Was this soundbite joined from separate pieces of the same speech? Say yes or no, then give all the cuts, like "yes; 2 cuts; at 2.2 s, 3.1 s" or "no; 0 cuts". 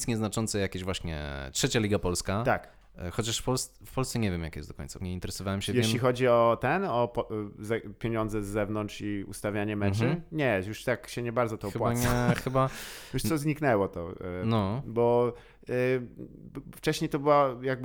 yes; 1 cut; at 5.0 s